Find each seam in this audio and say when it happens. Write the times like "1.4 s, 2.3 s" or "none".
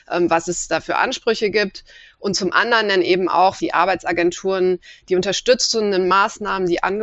3.6 s